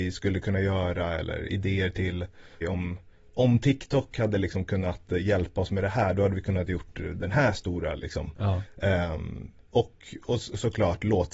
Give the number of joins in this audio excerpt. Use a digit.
2